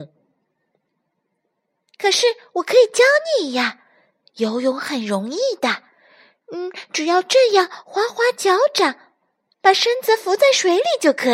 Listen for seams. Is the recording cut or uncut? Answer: uncut